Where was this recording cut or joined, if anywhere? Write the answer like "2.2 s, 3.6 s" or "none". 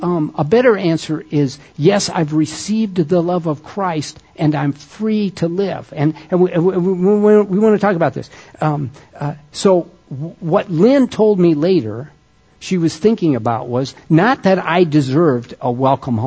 none